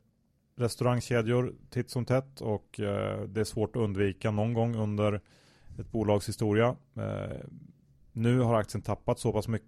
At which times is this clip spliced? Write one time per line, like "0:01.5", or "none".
none